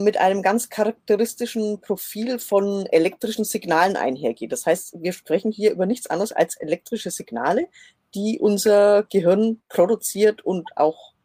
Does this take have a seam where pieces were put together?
no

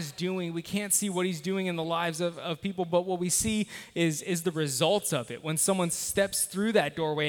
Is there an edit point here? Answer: no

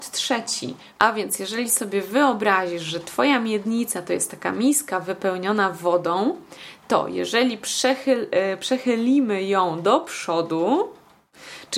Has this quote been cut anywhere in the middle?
yes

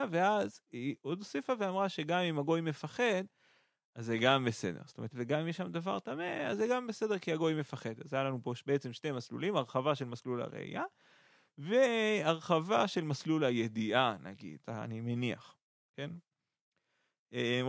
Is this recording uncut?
no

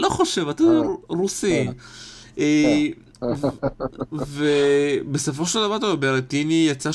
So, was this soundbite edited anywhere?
no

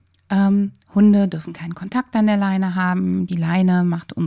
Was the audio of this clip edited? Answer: no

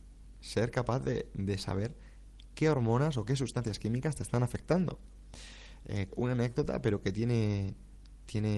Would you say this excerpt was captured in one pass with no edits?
no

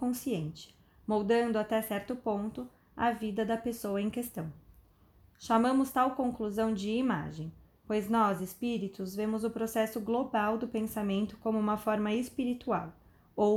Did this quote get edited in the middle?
no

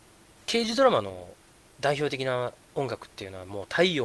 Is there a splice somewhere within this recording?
no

